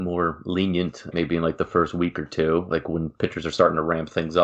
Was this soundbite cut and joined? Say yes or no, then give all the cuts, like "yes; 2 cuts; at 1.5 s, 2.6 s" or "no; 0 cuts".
yes; 1 cut; at 1.1 s